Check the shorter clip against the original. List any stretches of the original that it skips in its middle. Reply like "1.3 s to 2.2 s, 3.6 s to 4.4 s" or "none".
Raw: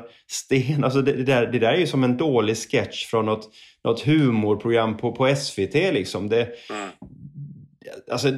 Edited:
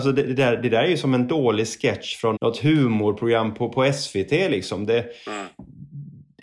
3.2 s to 3.8 s